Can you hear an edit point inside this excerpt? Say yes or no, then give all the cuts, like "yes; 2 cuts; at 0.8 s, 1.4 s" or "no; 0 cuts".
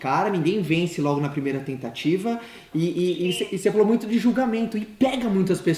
no; 0 cuts